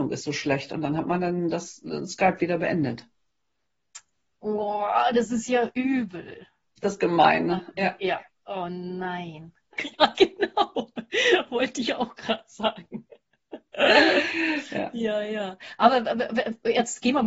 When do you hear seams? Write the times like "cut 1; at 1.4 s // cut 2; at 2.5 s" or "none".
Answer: cut 1; at 9.7 s